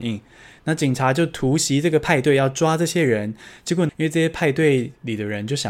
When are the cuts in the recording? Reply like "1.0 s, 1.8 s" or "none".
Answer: 3.9 s